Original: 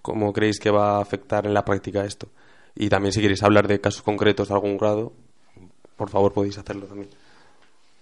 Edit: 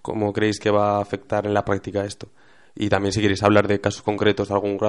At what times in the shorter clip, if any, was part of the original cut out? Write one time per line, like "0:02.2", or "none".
none